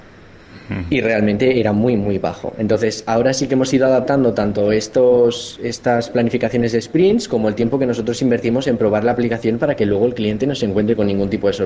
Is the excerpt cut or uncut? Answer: uncut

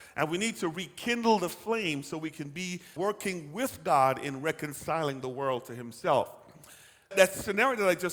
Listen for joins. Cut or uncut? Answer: cut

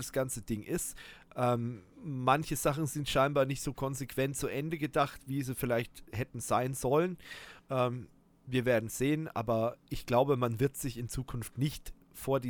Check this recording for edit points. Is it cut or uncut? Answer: cut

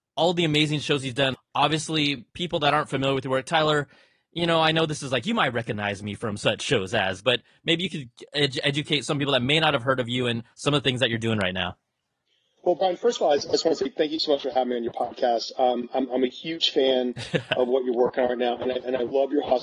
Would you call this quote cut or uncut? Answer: uncut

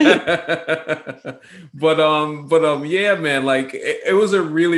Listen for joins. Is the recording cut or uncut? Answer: uncut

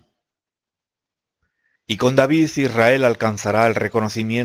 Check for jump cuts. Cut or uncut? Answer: cut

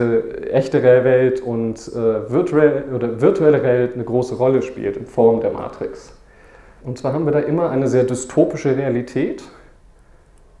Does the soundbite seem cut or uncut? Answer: cut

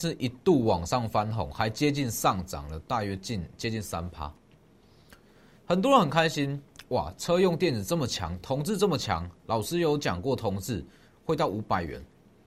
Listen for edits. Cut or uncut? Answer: uncut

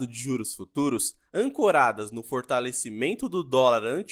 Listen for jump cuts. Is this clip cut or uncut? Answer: cut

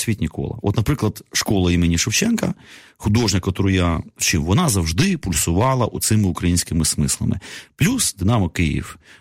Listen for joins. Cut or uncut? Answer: uncut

